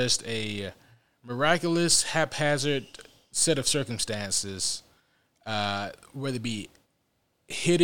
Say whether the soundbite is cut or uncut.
uncut